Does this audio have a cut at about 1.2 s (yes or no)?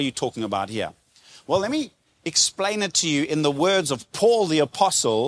no